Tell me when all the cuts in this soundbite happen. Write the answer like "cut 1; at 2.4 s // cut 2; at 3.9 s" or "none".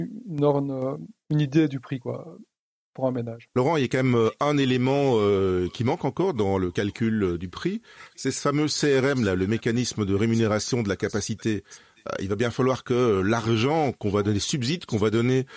none